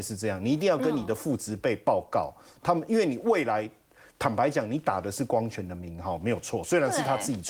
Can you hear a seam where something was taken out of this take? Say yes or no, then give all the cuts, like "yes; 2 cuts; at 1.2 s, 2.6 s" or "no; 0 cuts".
no; 0 cuts